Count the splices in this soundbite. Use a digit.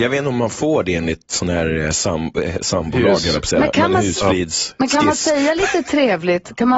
0